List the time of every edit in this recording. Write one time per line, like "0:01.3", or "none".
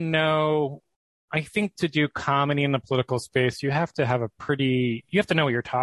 none